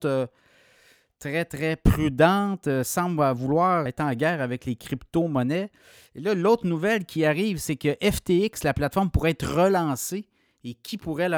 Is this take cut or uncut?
cut